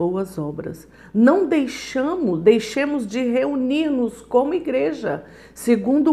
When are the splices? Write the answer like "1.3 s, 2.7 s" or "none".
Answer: none